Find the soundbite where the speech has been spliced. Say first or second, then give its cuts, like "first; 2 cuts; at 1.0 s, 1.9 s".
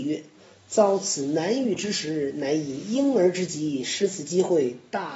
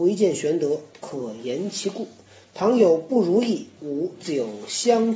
second; 1 cut; at 3.8 s